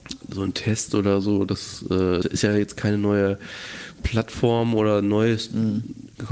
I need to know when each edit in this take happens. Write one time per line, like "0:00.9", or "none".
0:02.2